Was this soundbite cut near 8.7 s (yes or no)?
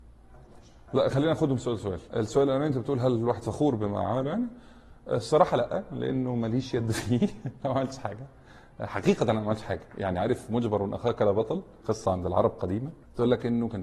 no